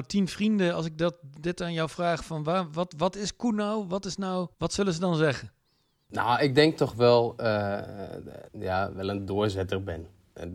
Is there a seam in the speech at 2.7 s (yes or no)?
no